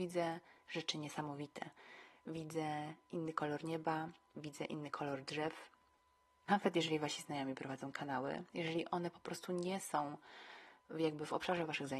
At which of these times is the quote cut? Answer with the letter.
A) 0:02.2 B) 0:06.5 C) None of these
B